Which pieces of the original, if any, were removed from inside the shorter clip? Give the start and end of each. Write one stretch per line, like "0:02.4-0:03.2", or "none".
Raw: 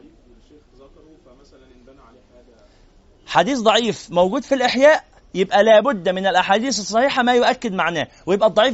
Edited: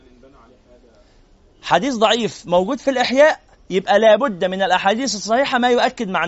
none